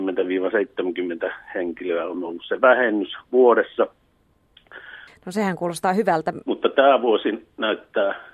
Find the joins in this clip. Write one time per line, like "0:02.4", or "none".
0:05.1
0:06.4